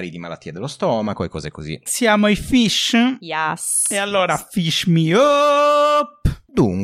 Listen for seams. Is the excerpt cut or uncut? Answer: cut